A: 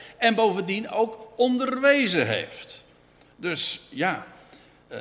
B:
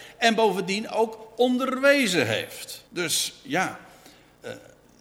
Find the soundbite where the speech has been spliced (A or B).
B